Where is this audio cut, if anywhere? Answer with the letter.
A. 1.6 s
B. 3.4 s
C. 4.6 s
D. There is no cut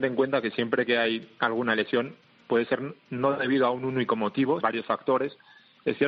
C